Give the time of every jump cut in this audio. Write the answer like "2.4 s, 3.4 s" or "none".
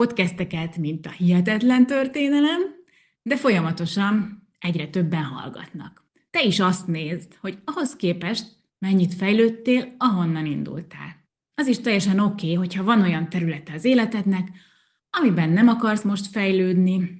11.5 s